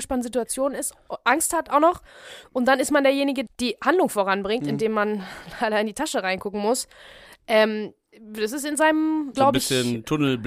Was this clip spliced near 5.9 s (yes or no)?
no